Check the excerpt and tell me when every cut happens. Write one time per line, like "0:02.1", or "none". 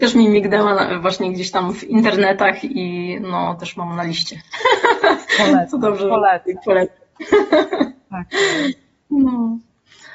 none